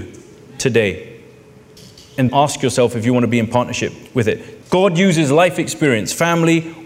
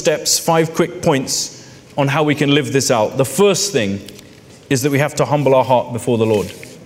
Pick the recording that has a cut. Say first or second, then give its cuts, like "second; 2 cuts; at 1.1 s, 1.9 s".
first; 2 cuts; at 2.3 s, 4.6 s